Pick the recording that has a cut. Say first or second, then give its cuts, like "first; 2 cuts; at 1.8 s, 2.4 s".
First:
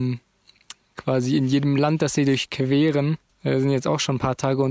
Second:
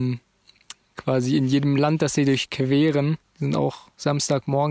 second; 1 cut; at 3.2 s